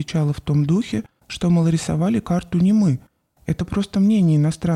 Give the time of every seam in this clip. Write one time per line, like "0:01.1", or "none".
none